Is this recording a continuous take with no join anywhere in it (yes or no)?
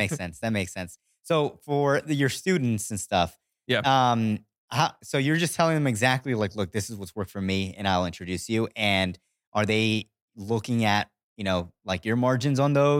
yes